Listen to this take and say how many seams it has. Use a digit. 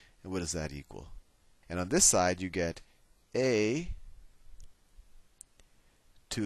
1